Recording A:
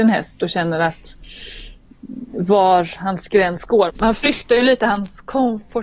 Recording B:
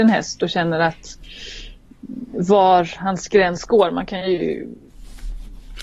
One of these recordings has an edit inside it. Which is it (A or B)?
A